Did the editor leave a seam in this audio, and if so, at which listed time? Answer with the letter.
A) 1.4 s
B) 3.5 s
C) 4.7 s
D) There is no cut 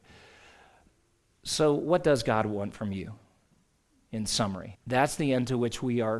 C